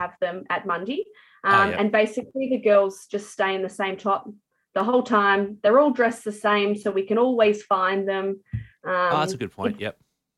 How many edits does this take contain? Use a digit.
0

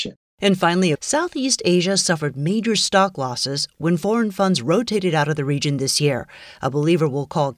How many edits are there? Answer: 1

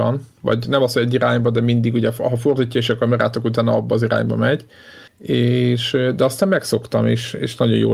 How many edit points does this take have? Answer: 1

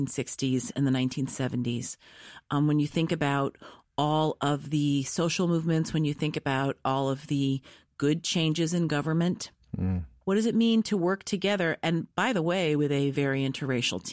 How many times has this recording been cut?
2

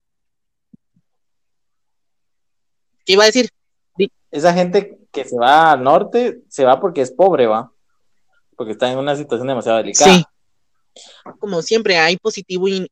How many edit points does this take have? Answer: 2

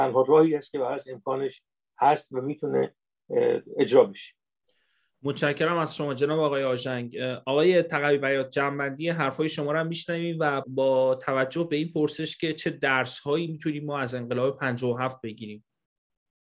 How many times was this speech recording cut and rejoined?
1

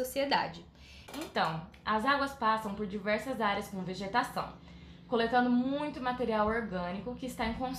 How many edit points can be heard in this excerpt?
1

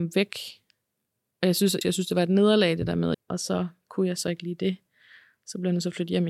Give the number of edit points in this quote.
2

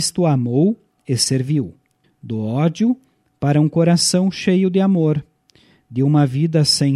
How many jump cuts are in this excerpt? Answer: 1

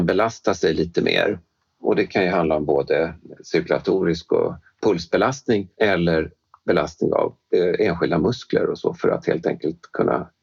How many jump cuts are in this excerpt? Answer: 1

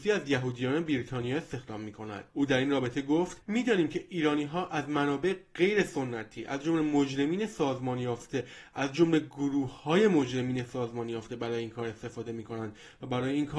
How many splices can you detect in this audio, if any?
1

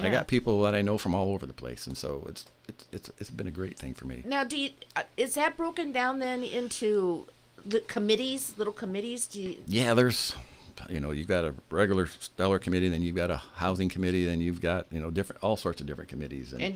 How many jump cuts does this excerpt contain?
1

